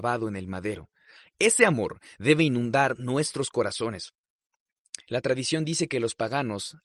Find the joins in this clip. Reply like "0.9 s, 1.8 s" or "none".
none